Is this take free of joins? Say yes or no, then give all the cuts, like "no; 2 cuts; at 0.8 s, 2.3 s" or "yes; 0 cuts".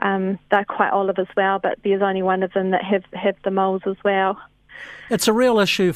yes; 0 cuts